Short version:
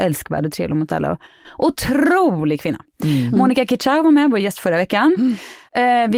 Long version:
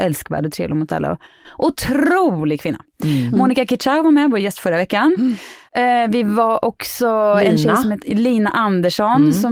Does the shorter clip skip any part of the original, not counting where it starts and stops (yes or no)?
no